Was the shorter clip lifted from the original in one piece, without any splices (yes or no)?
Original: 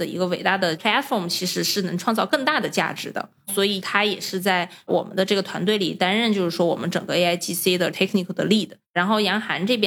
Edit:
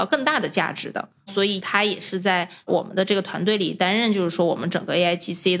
yes